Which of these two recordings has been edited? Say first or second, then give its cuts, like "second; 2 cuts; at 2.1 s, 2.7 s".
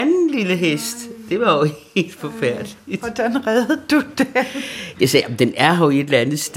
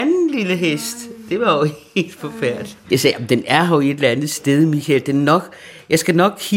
second; 1 cut; at 2.8 s